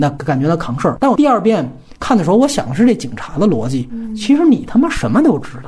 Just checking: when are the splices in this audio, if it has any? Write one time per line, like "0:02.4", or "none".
none